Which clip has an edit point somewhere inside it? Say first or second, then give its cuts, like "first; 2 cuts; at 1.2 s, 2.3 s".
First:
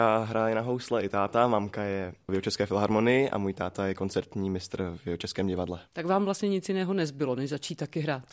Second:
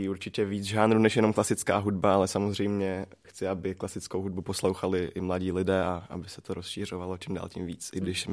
first; 1 cut; at 5.9 s